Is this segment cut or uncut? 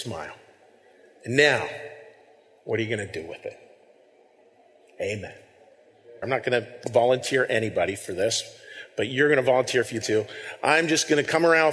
cut